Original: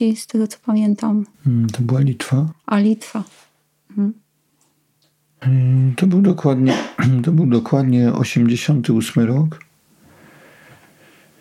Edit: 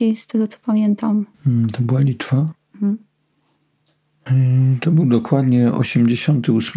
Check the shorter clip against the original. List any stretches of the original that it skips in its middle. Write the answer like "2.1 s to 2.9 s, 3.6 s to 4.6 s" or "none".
2.5 s to 3.7 s, 6.0 s to 7.2 s